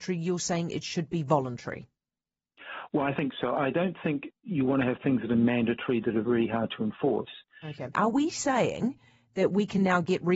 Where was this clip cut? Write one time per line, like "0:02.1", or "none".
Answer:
0:07.9